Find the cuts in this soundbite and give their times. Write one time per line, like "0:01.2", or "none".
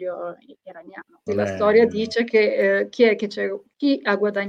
0:01.3